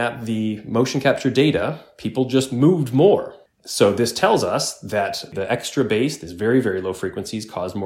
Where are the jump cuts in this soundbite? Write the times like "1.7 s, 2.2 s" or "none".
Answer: 3.5 s

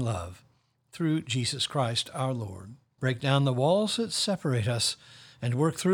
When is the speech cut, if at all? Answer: 3.0 s

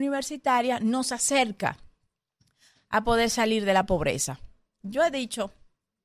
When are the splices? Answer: 4.8 s

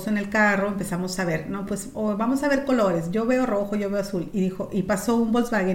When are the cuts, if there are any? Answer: none

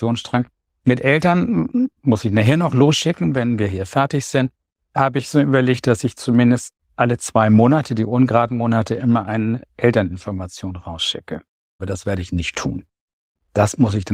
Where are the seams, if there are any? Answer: 11.8 s

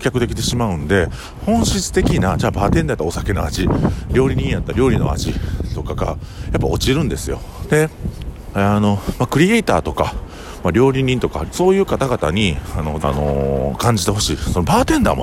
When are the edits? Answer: 7.6 s, 11.5 s, 13.0 s

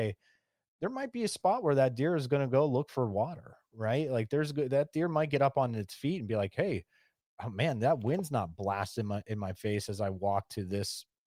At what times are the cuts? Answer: none

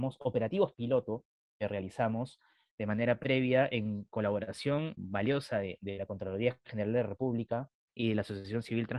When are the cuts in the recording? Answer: 5.0 s

